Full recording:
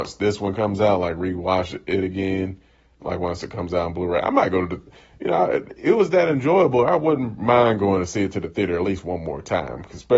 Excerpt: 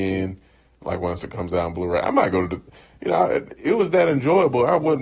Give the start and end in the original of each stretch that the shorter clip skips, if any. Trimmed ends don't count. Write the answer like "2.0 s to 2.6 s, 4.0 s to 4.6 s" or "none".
none

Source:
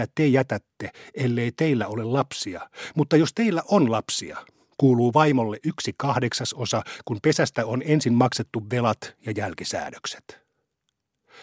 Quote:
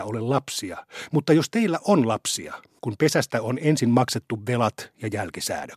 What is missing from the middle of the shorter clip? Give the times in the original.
4.6 s to 7.0 s

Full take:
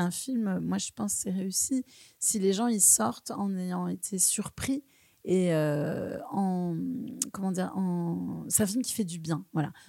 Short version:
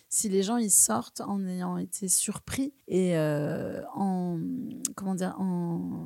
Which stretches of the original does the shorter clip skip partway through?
4.9 s to 5.2 s

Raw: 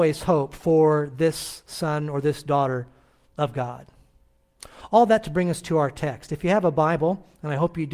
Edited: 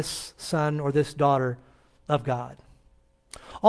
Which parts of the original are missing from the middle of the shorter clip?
none

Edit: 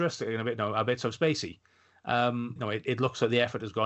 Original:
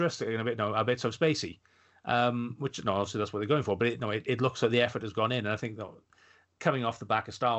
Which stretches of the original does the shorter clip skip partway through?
2.6 s to 4.0 s

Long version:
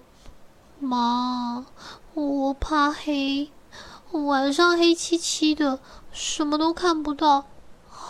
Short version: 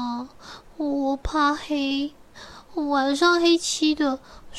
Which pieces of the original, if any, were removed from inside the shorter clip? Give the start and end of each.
5.0 s to 5.2 s

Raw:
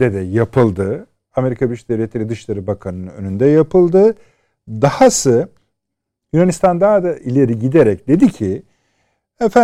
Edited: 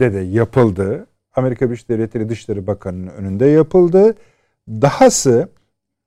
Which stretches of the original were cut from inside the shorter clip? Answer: none

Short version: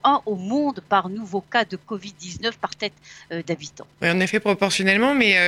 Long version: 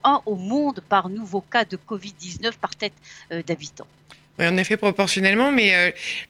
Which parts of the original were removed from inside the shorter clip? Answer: 3.9 s to 4.3 s

